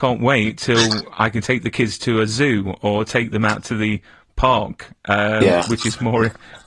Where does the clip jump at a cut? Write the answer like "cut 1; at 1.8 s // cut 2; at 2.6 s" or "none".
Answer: none